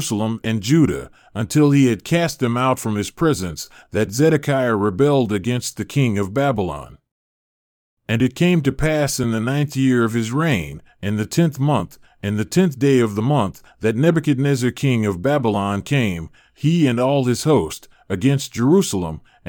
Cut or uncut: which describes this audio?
uncut